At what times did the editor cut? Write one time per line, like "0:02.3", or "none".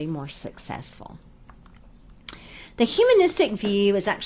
none